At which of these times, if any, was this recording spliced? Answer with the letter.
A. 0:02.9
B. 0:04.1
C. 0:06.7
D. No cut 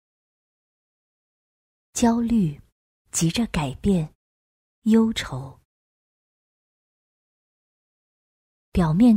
D